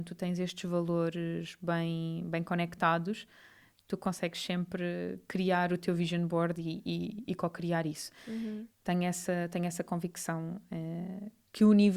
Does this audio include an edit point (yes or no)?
yes